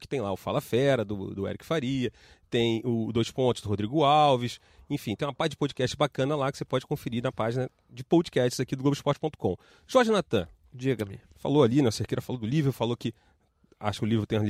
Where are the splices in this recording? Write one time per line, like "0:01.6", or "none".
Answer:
none